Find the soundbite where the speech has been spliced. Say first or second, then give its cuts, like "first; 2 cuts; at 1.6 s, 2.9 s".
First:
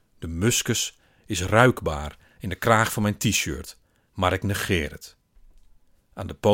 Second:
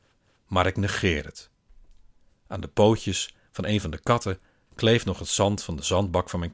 first; 1 cut; at 4.1 s